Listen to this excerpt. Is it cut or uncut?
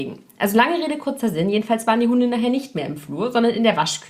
uncut